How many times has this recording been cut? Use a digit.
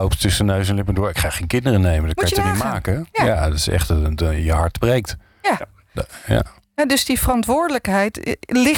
0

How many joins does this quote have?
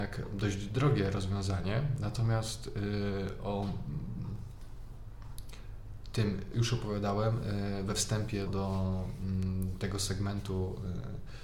2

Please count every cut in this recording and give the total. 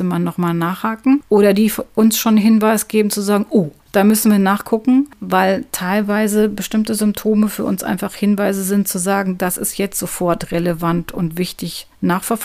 1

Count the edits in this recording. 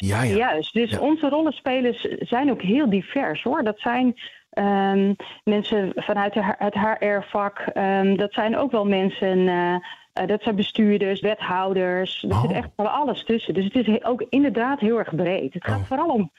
1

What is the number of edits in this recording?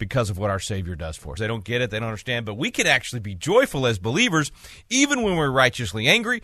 1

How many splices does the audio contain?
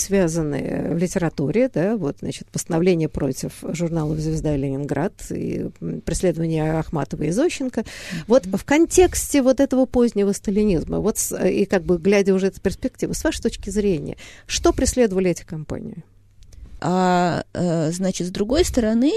1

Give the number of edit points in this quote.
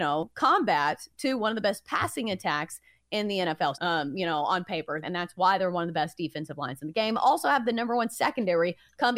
2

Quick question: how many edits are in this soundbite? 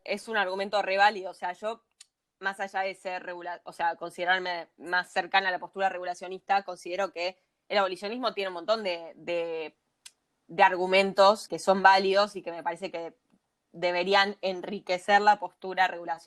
1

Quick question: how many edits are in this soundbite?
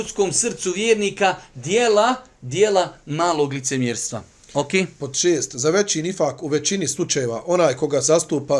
0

